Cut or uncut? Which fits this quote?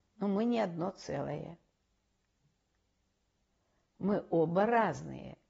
uncut